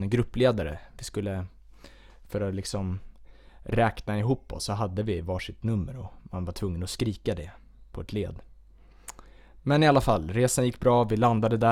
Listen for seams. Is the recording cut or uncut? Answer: cut